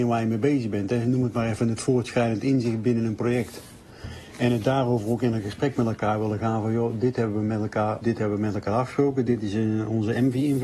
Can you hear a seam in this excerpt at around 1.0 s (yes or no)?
no